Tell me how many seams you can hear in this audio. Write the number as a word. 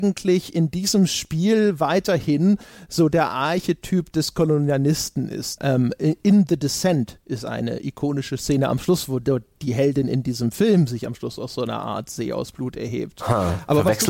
one